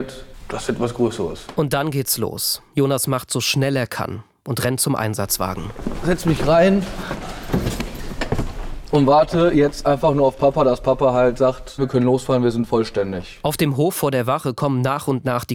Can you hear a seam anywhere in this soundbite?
yes; 1 cut; at 11.8 s

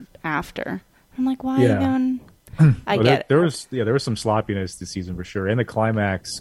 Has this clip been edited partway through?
no; 0 cuts

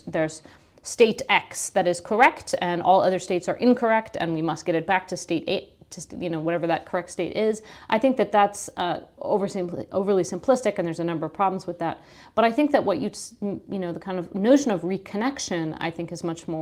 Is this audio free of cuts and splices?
yes; 0 cuts

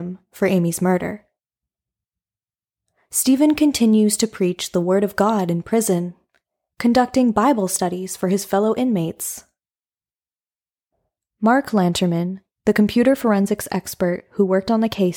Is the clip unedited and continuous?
yes; 0 cuts

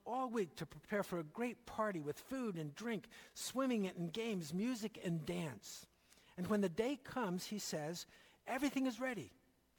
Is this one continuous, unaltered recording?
yes; 0 cuts

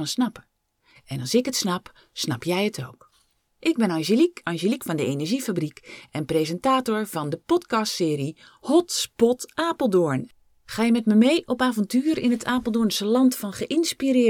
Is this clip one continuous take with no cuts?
no; 1 cut; at 1.0 s

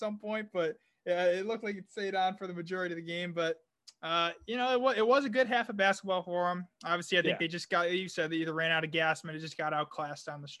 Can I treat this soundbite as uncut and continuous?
yes; 0 cuts

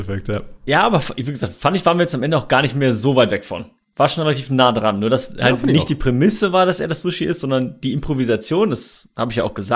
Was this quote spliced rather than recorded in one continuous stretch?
no; 0 cuts

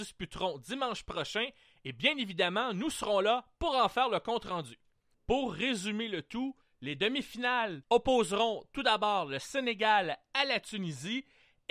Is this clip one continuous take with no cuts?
no; 1 cut; at 5.1 s

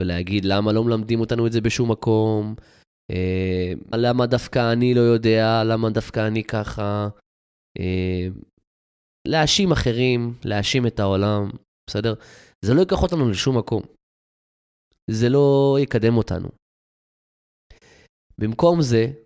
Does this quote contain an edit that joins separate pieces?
yes; 2 cuts; at 3.9 s, 11.8 s

